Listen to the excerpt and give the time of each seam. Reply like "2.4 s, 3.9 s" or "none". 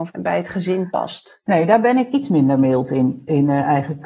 none